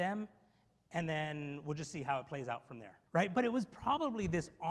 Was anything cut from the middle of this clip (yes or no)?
yes